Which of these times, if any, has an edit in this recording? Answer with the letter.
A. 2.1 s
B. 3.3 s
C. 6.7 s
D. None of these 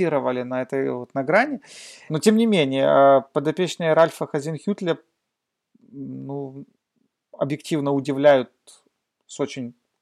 A